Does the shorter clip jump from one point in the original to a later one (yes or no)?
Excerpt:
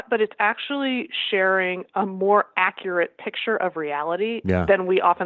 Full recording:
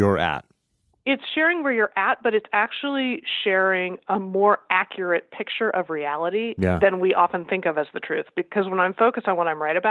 no